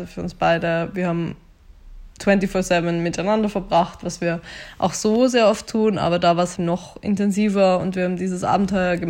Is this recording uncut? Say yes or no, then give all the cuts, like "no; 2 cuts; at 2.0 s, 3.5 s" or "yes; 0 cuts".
no; 1 cut; at 6.6 s